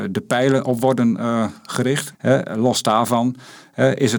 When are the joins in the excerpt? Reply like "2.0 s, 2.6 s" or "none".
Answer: 2.1 s